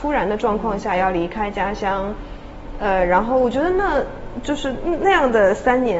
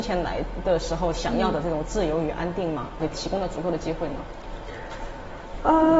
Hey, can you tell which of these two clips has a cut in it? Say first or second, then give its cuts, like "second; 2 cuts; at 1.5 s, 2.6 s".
second; 1 cut; at 3.0 s